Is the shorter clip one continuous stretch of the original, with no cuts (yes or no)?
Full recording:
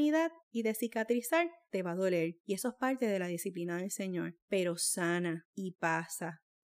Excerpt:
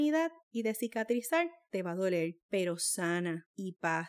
no